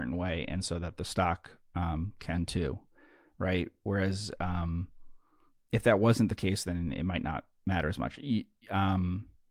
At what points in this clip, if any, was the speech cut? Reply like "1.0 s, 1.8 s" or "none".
none